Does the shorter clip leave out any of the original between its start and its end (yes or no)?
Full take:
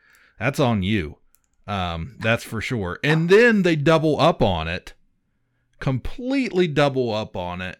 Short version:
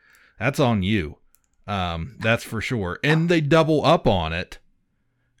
yes